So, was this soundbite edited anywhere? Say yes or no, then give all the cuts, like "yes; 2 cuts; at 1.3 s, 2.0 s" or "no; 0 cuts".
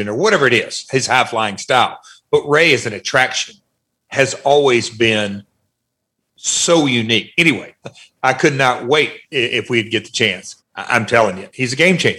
yes; 2 cuts; at 7.8 s, 10.6 s